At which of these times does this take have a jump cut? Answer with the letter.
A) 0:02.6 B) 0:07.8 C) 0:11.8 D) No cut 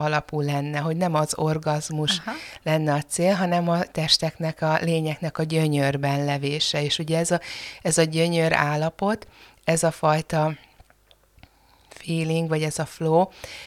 D